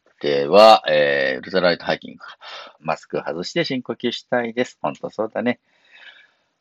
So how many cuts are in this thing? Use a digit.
1